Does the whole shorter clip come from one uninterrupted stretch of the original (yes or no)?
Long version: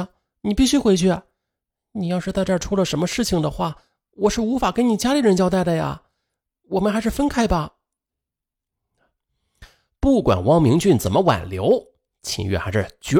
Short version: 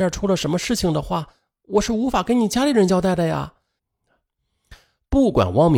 no